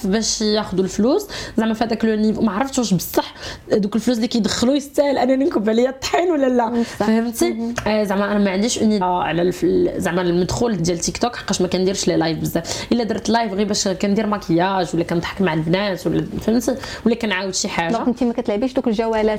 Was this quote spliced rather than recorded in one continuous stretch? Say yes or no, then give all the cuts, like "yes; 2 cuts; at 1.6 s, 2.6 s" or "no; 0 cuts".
yes; 2 cuts; at 9.0 s, 10.8 s